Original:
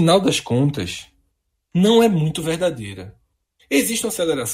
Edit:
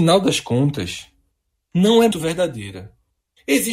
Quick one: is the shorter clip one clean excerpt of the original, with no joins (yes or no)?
no